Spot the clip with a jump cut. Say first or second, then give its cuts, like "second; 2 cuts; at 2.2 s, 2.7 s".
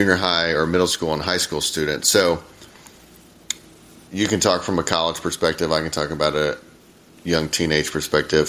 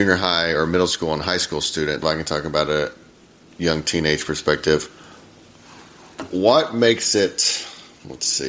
second; 1 cut; at 2.0 s